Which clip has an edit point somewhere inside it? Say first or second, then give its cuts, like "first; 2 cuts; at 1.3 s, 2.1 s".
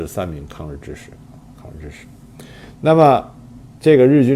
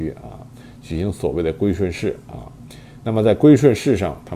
first; 1 cut; at 2.8 s